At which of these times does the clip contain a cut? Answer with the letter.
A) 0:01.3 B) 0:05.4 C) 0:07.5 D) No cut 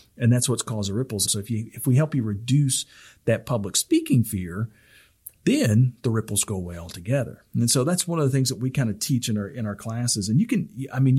A